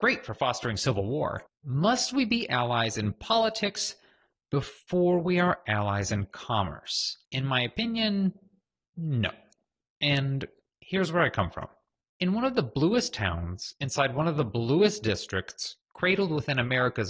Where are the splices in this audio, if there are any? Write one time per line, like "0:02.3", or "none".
0:07.2